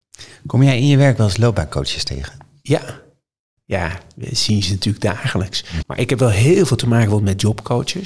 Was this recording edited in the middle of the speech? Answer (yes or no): yes